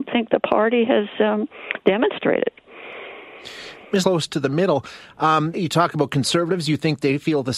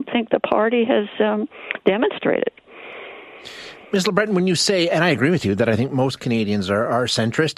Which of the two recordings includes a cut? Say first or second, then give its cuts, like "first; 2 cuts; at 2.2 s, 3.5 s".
first; 2 cuts; at 4.0 s, 5.5 s